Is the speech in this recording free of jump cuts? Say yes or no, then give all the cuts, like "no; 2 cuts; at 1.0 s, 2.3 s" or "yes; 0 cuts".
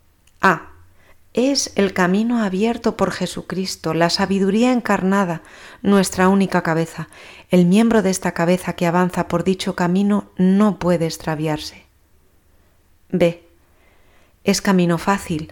yes; 0 cuts